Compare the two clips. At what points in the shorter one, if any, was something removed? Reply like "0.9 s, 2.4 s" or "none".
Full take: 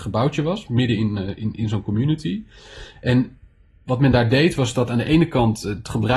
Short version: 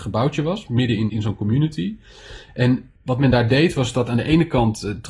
1.1 s, 3.0 s